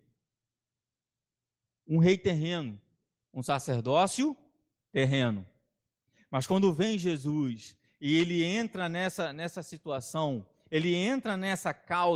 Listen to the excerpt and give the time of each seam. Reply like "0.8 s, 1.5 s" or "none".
none